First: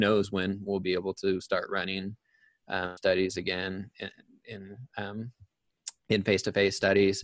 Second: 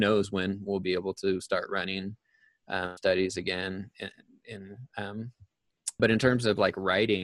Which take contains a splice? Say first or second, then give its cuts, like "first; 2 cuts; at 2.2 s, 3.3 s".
second; 1 cut; at 6.0 s